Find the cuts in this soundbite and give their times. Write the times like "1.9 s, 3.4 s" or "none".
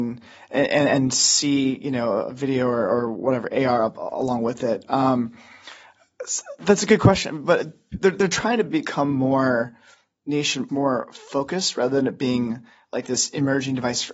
10.7 s